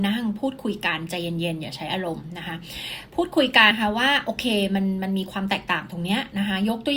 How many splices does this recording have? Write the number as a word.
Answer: one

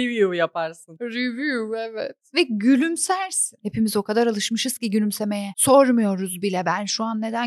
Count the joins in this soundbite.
zero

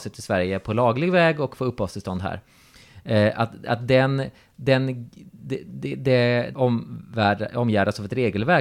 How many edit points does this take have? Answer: one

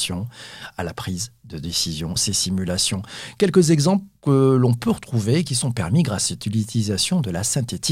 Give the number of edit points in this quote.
one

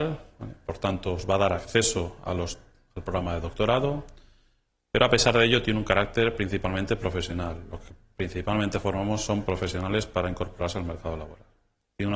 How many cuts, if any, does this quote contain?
zero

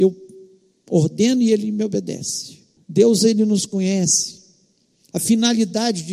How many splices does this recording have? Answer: two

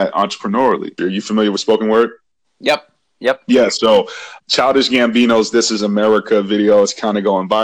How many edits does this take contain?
two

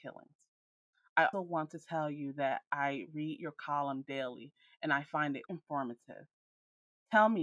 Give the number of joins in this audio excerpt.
two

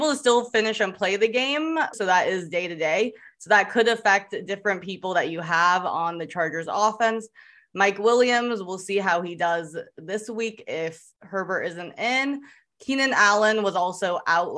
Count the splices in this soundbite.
one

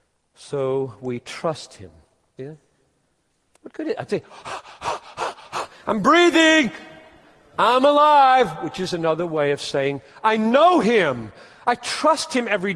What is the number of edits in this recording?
one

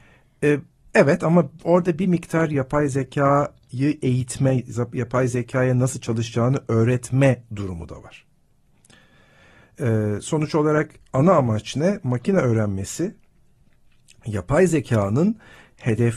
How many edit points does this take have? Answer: zero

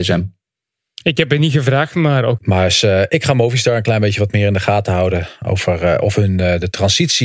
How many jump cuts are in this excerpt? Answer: one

